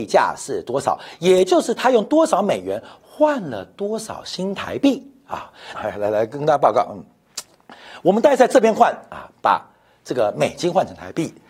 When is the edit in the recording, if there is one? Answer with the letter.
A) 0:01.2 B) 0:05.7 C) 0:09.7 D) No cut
B